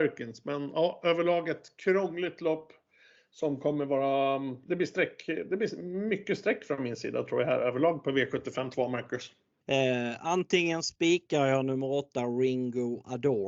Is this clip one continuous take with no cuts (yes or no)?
no